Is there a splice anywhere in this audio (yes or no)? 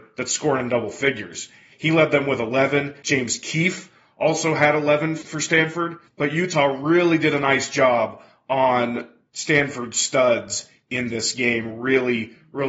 no